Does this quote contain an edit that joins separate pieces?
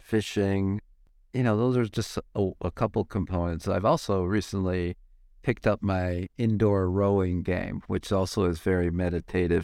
no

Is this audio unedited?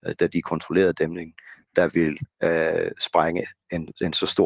yes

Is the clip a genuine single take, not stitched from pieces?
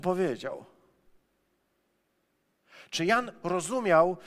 yes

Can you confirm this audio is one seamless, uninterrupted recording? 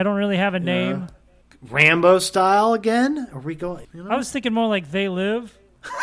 no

